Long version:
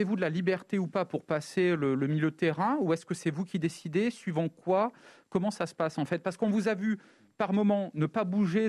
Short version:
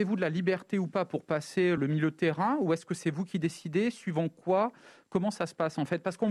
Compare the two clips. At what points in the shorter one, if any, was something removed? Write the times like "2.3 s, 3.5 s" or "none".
1.8 s